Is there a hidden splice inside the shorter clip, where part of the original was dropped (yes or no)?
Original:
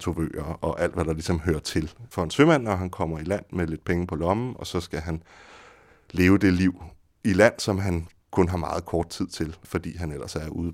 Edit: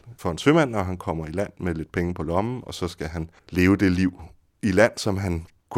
yes